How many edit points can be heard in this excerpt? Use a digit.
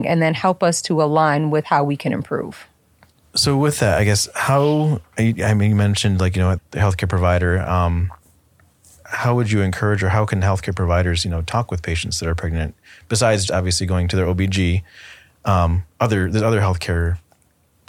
2